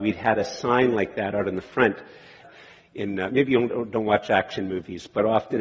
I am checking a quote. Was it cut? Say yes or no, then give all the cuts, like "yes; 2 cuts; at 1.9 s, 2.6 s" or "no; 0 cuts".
yes; 1 cut; at 2.4 s